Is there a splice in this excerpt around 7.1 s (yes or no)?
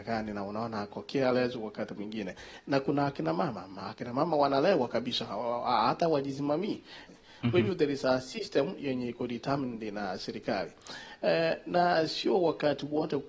yes